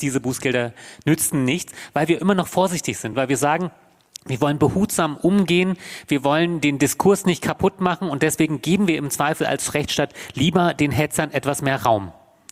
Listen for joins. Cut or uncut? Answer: uncut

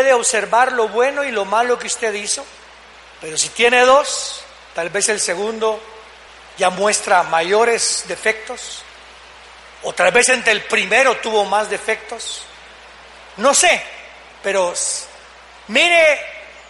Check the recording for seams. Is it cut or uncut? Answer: uncut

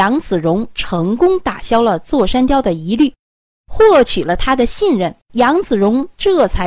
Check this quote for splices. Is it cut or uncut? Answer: cut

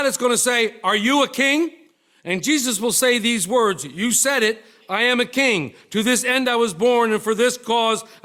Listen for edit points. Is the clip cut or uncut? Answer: uncut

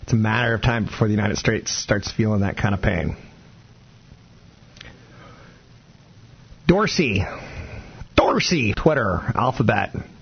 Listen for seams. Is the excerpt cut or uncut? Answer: cut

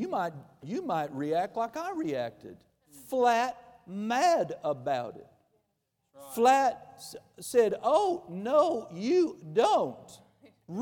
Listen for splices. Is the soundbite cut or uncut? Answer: uncut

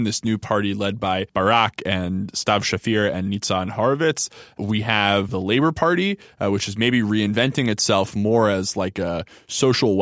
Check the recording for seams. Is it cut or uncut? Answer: uncut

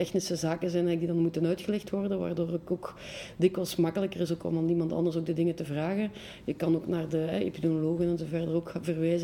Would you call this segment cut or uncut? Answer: uncut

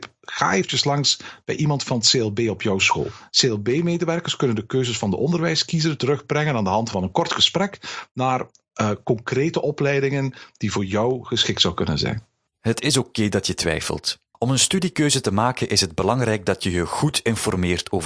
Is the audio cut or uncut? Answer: cut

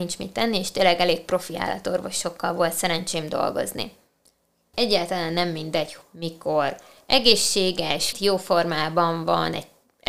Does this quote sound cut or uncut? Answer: cut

